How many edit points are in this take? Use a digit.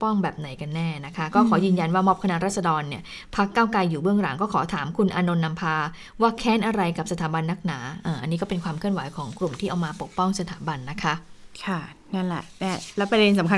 0